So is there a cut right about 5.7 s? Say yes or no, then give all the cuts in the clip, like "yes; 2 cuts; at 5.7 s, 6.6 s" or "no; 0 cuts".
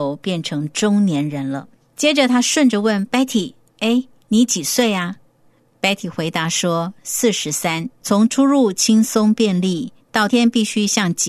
no; 2 cuts; at 7.9 s, 10.3 s